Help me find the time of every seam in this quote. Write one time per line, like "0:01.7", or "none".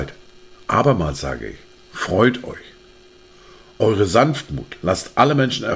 none